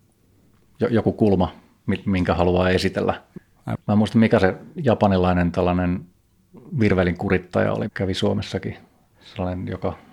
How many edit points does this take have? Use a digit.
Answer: 1